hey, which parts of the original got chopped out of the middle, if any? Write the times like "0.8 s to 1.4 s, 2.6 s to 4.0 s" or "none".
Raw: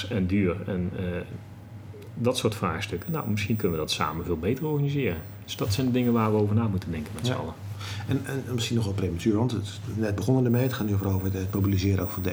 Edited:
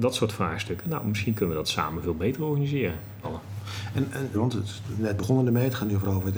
5.5 s to 7.4 s, 8.5 s to 9.3 s